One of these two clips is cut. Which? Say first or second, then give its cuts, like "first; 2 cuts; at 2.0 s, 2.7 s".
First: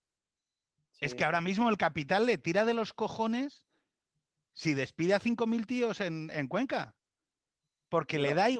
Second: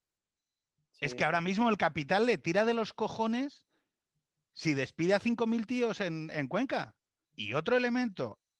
second; 1 cut; at 7.2 s